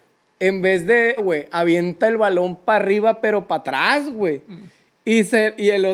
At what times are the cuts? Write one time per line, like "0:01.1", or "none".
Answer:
0:01.2